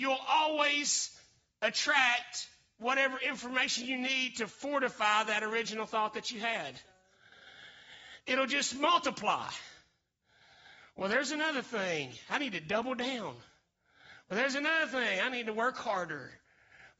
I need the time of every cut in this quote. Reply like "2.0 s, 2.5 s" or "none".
none